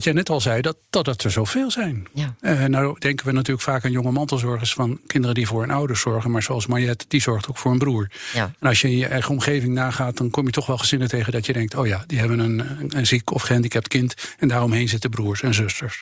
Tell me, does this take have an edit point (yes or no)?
no